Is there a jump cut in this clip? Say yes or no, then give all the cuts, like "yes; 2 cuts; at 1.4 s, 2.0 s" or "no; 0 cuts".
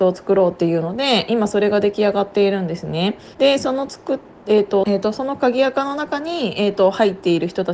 yes; 2 cuts; at 3.3 s, 4.8 s